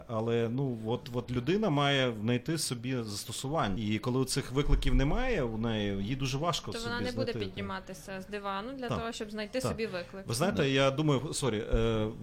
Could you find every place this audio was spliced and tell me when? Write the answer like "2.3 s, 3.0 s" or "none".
3.8 s